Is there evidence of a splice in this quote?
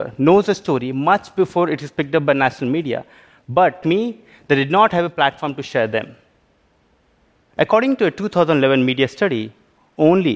yes; 1 cut; at 3.8 s

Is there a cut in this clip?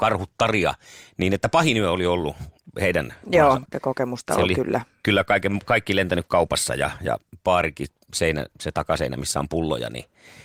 yes; 1 cut; at 3.6 s

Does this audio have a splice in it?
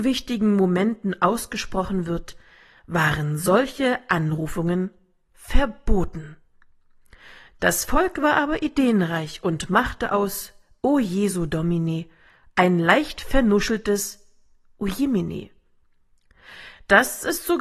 no; 0 cuts

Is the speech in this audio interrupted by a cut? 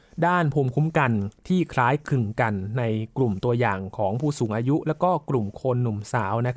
yes; 1 cut; at 1.4 s

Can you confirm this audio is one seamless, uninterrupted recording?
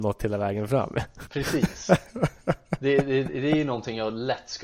yes; 0 cuts

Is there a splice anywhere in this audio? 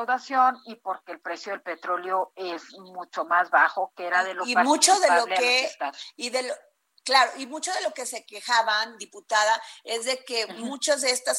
no; 0 cuts

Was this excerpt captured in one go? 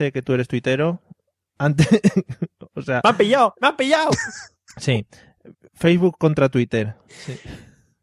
no; 1 cut; at 7.1 s

